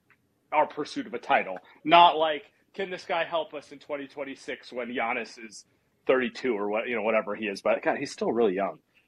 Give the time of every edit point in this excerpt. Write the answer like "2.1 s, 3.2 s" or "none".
none